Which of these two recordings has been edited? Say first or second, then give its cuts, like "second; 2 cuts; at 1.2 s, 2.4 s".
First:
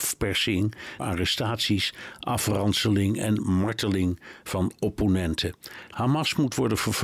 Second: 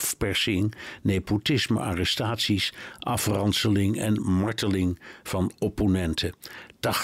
first; 2 cuts; at 1.0 s, 5.9 s